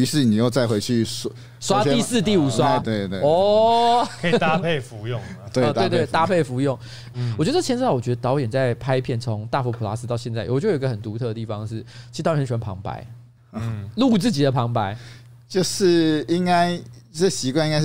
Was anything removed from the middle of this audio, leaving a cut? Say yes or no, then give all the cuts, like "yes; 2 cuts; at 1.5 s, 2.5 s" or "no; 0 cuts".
yes; 2 cuts; at 2.8 s, 7.1 s